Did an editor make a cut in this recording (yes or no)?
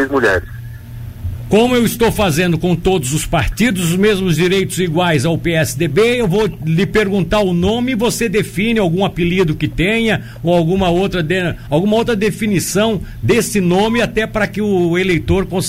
no